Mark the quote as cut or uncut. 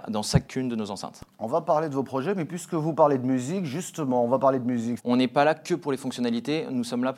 cut